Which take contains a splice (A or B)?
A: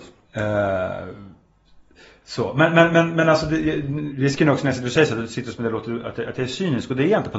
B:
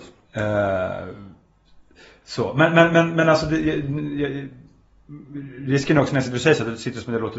A